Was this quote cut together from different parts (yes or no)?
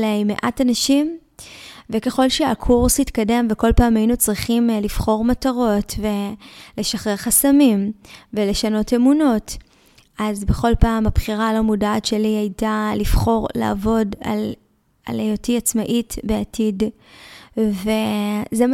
no